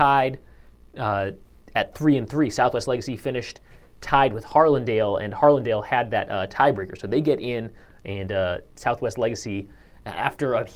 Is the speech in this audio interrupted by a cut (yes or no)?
no